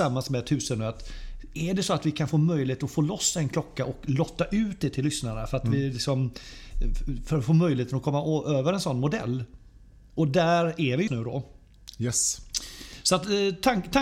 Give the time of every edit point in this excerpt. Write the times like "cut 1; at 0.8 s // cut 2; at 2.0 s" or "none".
cut 1; at 11.1 s

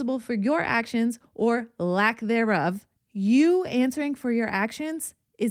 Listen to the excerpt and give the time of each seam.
cut 1; at 3.0 s

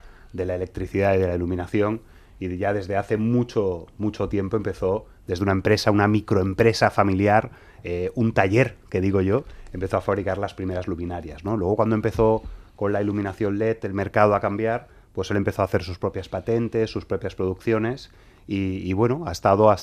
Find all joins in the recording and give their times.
none

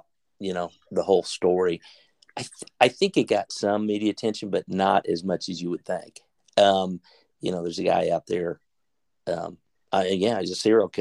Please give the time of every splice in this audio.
none

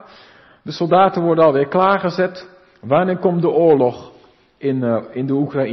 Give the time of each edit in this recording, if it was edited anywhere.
none

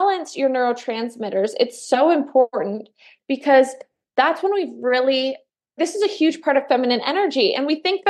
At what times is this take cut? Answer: cut 1; at 5.8 s

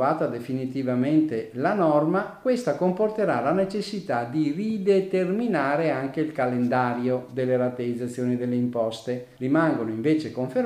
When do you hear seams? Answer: cut 1; at 9.4 s

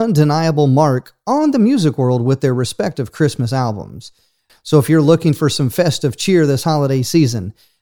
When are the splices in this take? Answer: cut 1; at 4.5 s

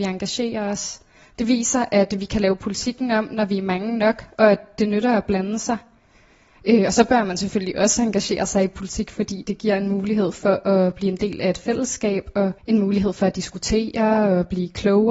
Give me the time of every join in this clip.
cut 1; at 12.6 s

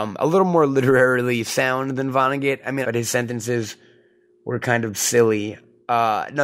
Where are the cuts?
cut 1; at 2.8 s

